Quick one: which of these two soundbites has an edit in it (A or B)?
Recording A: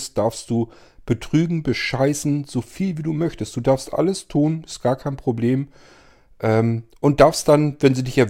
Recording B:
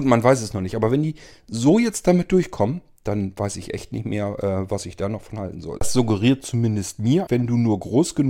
B